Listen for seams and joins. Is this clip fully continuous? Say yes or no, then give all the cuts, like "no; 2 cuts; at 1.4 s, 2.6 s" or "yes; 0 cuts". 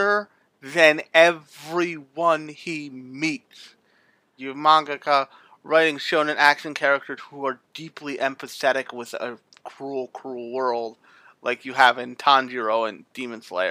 no; 1 cut; at 4.4 s